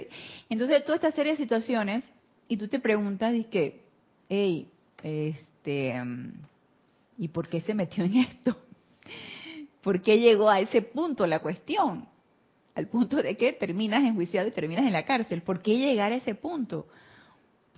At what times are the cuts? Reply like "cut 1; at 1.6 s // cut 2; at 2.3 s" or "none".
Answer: none

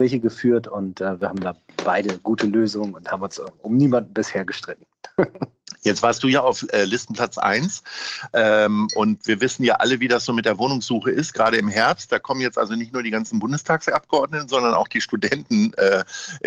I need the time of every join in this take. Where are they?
none

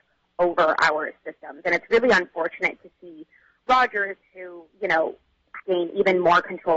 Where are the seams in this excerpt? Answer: cut 1; at 5.6 s

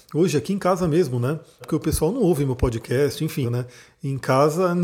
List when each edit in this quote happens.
cut 1; at 1.6 s // cut 2; at 3.4 s

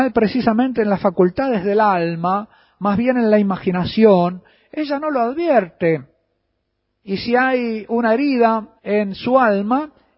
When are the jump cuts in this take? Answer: cut 1; at 7.0 s // cut 2; at 8.8 s

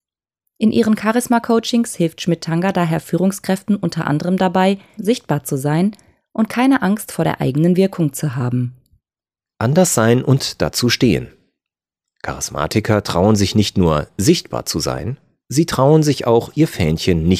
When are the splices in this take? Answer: cut 1; at 5.0 s

